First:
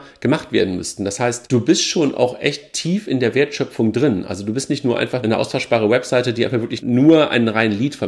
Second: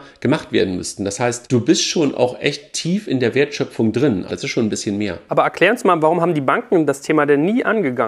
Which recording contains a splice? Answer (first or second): second